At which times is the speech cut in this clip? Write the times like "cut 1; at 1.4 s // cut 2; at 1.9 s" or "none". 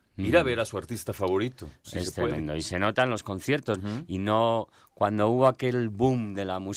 cut 1; at 1.8 s // cut 2; at 3.8 s